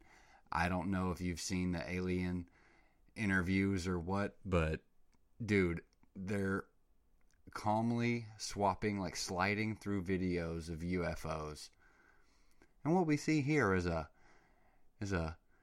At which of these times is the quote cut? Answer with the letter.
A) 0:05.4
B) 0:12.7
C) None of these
C